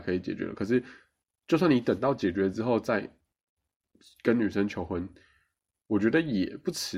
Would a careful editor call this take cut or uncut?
uncut